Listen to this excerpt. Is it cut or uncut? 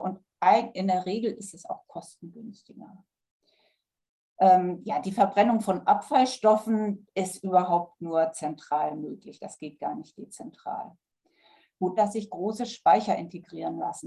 cut